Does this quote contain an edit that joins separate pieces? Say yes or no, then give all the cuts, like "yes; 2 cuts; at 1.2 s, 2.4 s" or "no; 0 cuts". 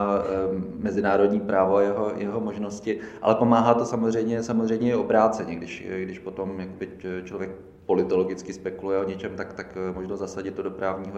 no; 0 cuts